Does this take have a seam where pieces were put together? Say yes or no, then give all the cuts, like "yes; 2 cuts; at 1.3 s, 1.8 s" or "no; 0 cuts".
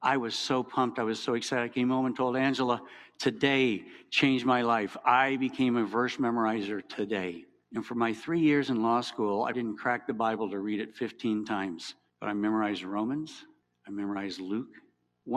yes; 1 cut; at 9.5 s